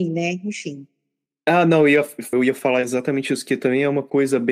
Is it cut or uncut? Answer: cut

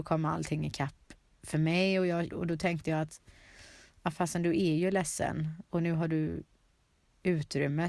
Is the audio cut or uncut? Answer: cut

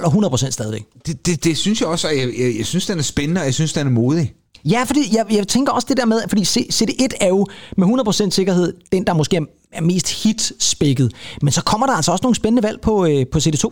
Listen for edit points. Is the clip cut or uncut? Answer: uncut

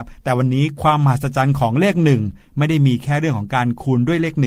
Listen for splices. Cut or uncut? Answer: uncut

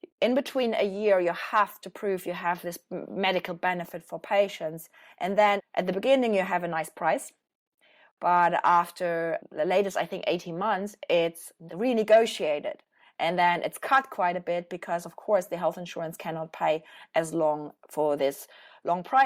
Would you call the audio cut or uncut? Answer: cut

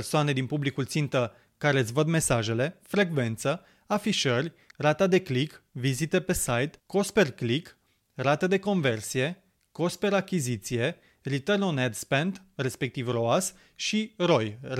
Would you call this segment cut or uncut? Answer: cut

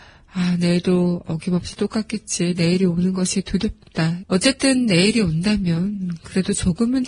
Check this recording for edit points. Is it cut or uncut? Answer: cut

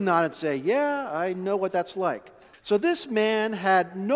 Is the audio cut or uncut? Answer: cut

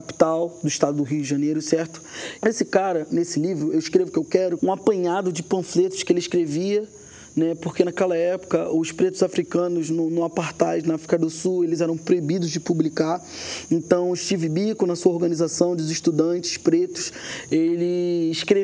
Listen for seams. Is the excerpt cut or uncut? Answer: cut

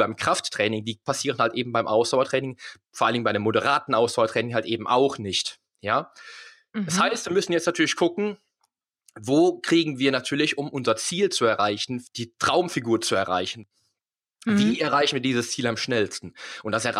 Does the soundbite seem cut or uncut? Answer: uncut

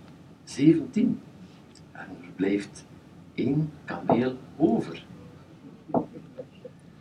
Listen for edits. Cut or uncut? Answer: uncut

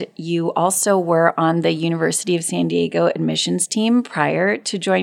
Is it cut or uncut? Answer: uncut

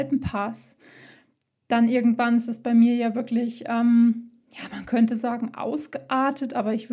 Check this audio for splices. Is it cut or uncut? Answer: uncut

